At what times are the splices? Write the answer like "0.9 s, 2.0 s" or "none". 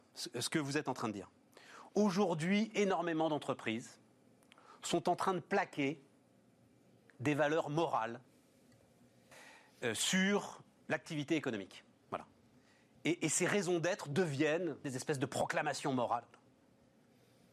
14.8 s